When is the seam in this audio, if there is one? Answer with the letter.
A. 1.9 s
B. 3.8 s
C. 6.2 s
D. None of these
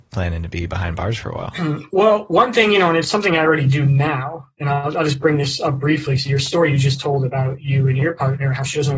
D